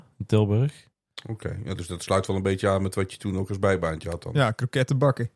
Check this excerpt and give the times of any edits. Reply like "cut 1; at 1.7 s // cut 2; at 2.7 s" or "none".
none